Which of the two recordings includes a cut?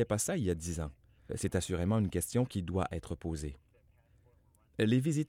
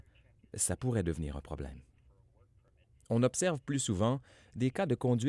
first; 1 cut; at 1.3 s

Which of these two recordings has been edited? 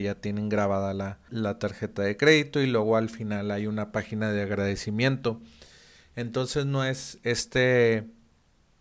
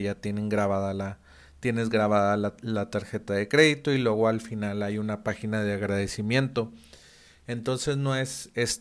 first; 1 cut; at 1.3 s

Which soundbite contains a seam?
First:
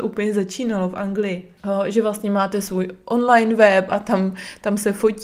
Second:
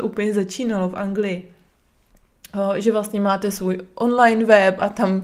first; 1 cut; at 1.6 s

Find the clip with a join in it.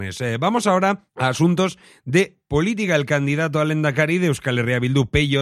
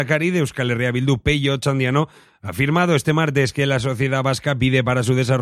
first; 1 cut; at 1.1 s

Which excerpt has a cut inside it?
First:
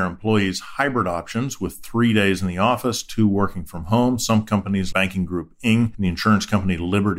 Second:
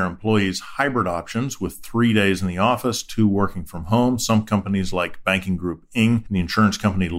first; 1 cut; at 4.9 s

